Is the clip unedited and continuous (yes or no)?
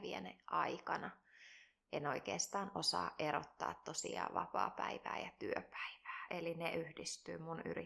yes